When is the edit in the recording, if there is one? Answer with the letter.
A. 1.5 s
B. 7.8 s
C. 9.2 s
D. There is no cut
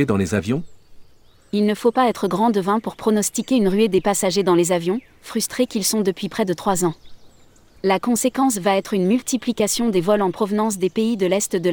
D